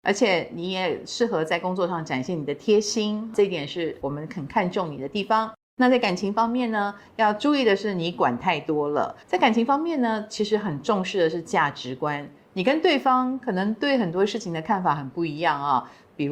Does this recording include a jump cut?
yes; 1 cut; at 9.2 s

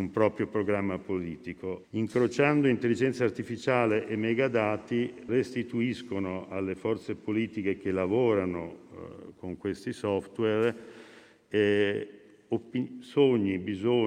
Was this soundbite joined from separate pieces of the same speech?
yes; 2 cuts; at 1.8 s, 5.3 s

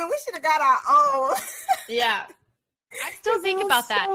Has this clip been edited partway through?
no; 0 cuts

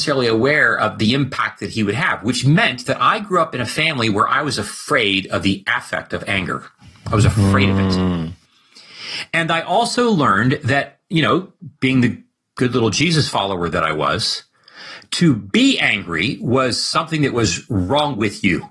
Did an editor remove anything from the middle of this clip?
no; 0 cuts

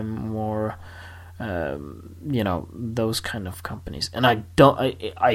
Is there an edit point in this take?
no; 0 cuts

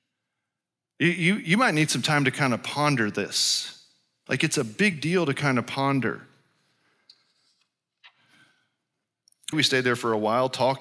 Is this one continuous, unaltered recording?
no; 2 cuts; at 4.3 s, 9.5 s

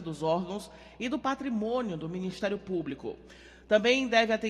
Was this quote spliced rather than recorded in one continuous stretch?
no; 0 cuts

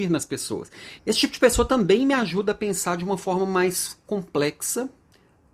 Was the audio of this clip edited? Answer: yes; 1 cut; at 1.0 s

